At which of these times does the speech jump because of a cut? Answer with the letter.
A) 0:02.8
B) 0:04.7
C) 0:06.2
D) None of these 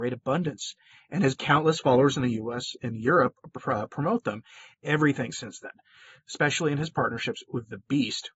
B